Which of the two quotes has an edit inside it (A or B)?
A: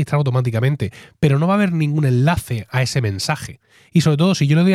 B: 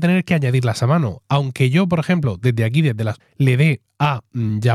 B